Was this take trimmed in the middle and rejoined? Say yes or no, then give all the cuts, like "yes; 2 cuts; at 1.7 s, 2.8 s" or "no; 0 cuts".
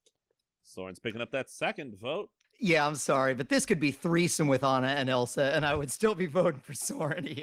yes; 1 cut; at 2.4 s